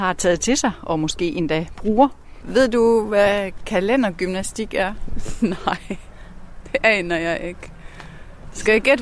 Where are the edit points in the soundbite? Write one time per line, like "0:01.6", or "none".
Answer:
none

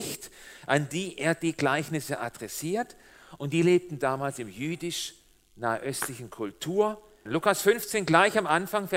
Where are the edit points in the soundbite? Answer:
0:07.3

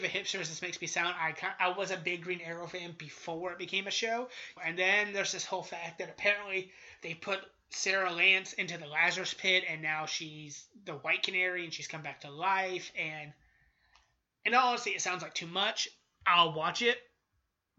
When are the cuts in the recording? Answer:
0:04.6

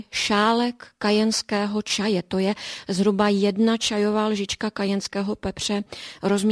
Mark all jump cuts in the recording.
none

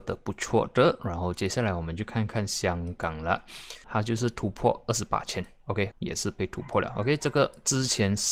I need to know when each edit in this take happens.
0:03.8
0:05.9

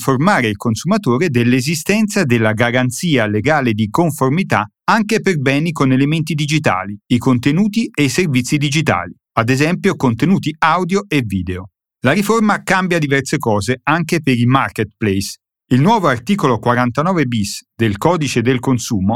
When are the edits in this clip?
none

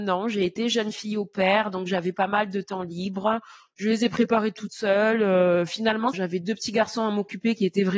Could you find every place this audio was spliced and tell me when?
0:06.1

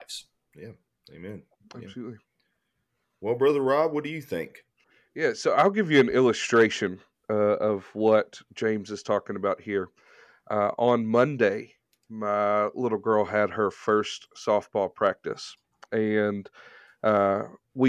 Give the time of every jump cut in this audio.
none

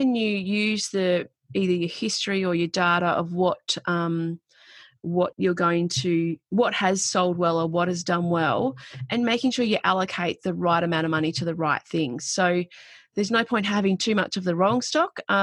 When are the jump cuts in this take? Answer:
none

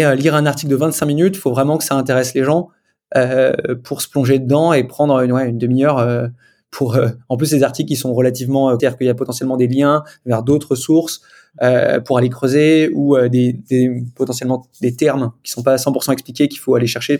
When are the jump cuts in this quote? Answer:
0:08.8

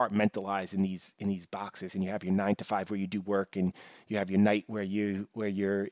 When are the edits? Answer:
0:01.9

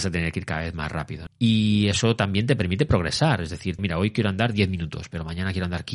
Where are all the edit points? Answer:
0:01.3
0:03.8

